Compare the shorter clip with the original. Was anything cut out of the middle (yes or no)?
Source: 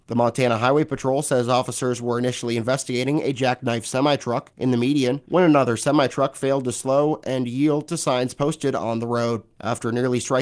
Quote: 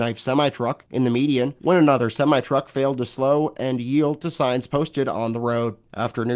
no